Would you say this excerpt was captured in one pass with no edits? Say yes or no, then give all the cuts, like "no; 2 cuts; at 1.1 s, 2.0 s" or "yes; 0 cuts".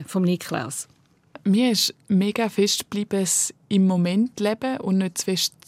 yes; 0 cuts